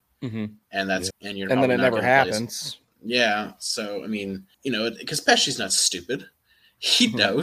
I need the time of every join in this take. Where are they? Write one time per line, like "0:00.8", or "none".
0:01.1
0:04.5